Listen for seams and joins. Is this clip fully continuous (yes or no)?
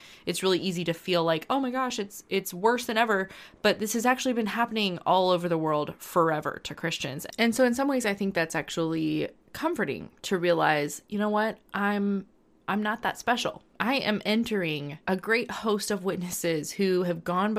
no